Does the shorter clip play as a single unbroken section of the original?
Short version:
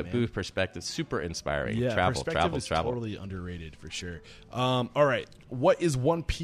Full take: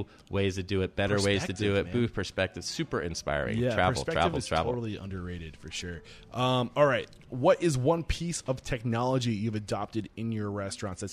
yes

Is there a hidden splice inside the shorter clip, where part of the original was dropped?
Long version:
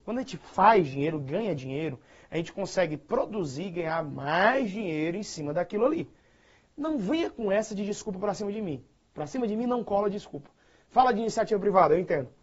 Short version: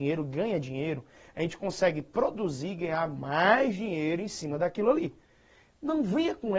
no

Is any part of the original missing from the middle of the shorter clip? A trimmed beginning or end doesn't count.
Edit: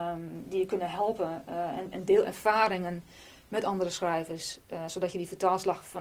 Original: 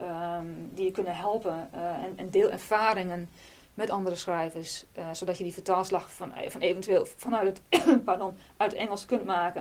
no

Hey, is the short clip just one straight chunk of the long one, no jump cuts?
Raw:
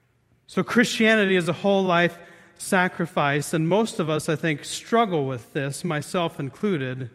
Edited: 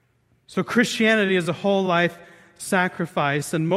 yes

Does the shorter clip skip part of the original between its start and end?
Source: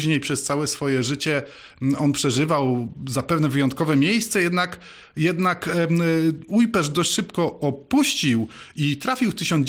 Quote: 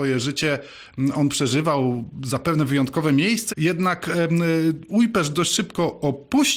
yes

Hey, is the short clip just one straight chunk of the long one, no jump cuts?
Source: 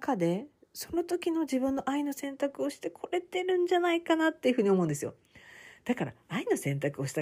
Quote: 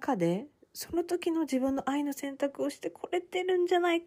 yes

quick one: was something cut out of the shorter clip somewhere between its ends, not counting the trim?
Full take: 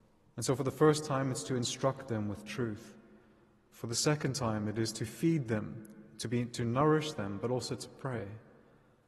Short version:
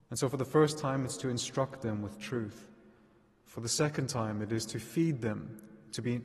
no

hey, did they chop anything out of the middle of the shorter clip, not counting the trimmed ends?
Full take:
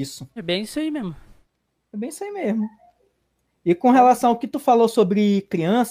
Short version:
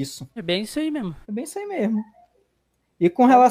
yes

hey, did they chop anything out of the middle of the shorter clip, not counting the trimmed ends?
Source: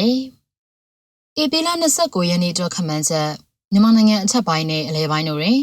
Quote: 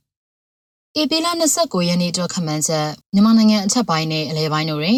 yes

